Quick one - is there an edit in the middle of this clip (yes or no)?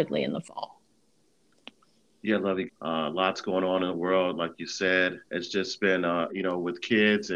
yes